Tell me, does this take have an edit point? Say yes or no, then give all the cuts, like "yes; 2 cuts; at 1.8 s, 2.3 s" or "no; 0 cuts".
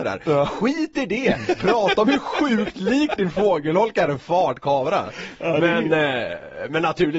no; 0 cuts